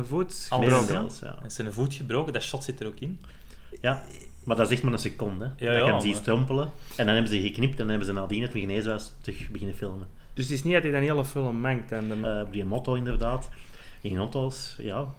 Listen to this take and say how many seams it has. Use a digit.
1